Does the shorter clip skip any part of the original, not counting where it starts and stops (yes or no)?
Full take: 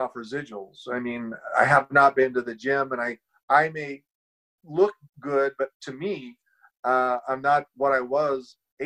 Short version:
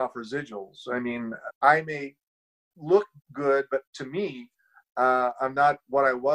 yes